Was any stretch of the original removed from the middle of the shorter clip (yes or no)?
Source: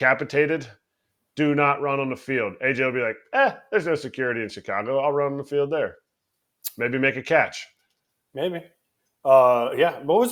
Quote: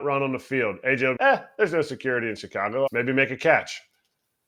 yes